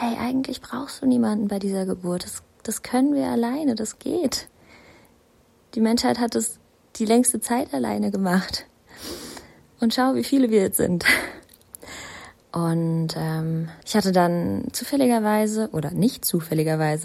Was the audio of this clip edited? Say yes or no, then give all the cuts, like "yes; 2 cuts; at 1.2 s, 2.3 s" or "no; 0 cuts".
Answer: yes; 2 cuts; at 12.4 s, 13.8 s